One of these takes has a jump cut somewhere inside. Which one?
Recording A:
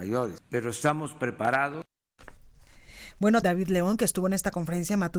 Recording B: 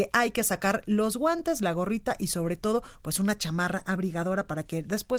A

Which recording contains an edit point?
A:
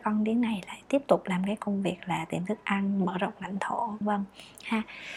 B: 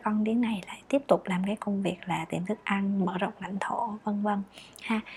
A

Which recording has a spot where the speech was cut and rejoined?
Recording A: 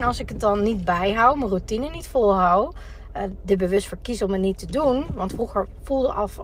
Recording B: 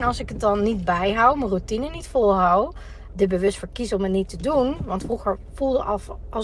B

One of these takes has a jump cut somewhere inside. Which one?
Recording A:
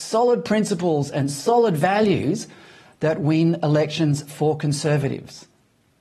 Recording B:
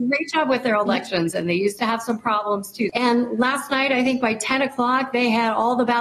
B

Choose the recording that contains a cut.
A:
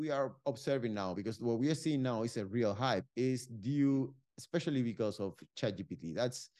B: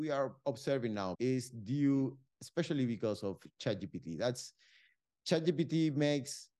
B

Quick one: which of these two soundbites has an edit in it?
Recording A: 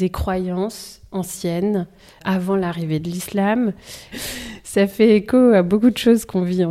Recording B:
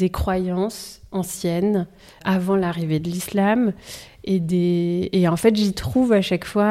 A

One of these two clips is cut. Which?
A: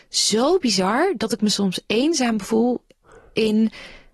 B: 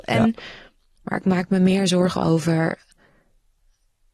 B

